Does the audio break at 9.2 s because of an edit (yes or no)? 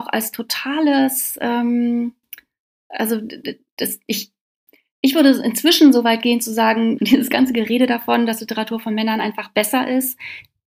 no